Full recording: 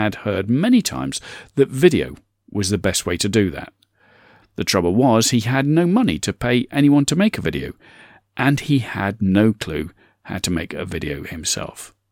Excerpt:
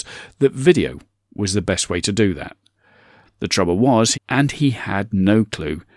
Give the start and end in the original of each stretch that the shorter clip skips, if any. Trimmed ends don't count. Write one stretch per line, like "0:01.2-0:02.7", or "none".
0:05.3-0:08.2